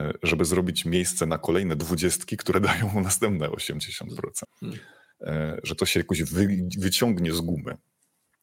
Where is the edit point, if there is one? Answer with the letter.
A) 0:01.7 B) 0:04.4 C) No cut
B